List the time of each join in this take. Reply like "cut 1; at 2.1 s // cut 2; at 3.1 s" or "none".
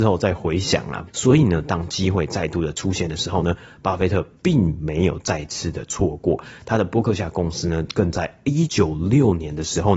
cut 1; at 1.1 s // cut 2; at 8.7 s